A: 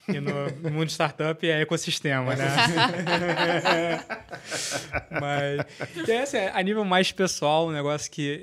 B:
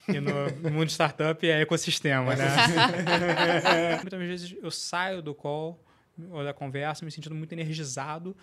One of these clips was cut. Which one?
B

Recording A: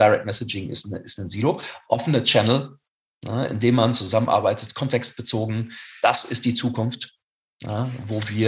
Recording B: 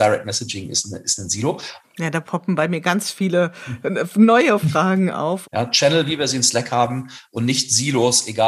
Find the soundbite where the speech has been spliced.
B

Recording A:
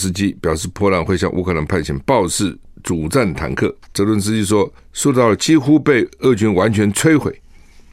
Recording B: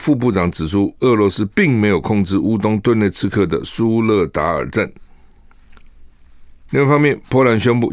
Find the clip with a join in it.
A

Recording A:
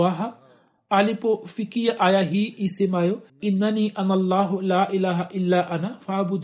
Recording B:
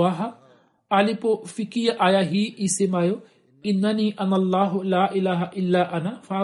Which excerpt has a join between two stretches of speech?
A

